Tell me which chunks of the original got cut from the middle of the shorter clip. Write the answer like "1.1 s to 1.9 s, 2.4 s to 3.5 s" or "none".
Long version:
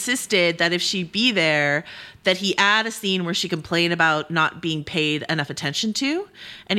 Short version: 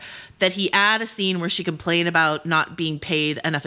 none